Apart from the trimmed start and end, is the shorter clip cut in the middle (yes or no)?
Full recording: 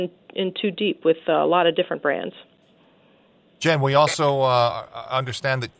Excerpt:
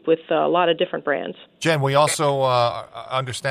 yes